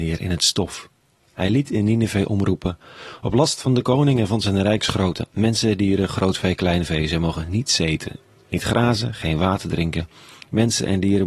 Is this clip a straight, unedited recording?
yes; 0 cuts

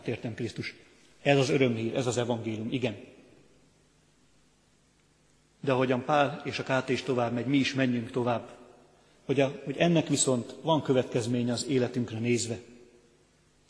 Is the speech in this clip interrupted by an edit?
no; 0 cuts

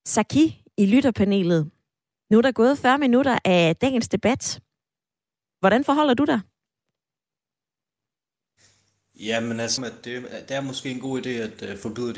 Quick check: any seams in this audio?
yes; 1 cut; at 9.8 s

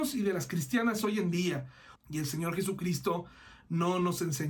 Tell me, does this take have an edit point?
yes; 1 cut; at 2.0 s

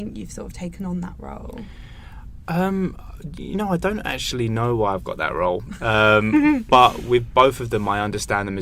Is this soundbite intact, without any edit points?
yes; 0 cuts

